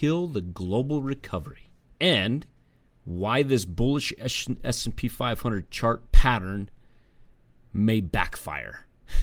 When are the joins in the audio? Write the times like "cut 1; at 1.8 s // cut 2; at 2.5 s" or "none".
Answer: none

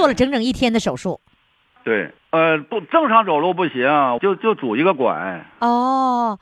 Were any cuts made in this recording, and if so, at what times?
cut 1; at 2.2 s // cut 2; at 4.2 s

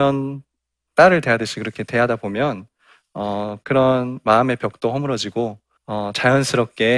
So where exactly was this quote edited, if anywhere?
cut 1; at 5.8 s

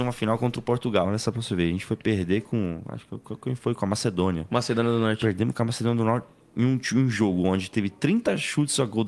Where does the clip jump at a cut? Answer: cut 1; at 1.0 s

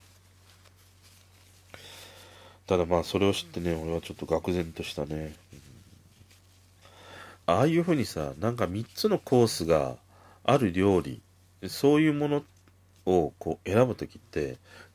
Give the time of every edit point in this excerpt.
cut 1; at 7.4 s

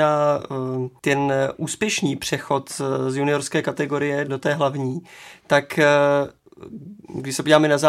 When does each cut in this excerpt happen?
cut 1; at 4.3 s

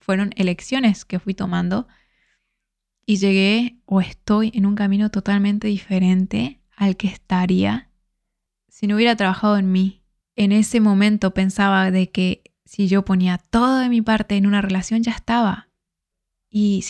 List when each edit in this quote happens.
cut 1; at 10.2 s

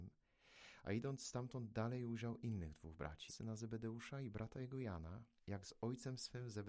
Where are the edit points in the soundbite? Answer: cut 1; at 3.3 s // cut 2; at 5.4 s

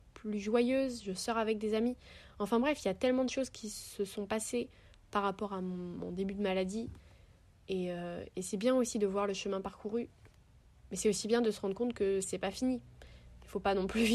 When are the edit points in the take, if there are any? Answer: none

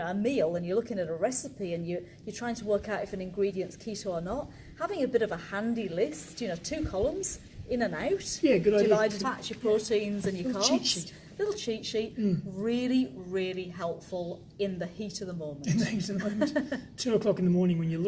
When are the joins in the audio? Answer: cut 1; at 9.2 s

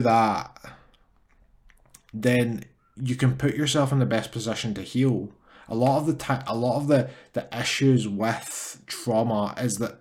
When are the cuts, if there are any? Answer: none

